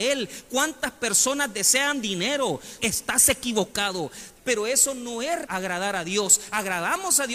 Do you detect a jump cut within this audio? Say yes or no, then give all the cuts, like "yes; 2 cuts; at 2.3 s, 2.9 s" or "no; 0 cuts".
yes; 3 cuts; at 2.8 s, 4.4 s, 5.4 s